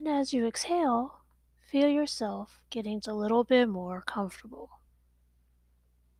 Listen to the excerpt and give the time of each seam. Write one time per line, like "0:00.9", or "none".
0:03.0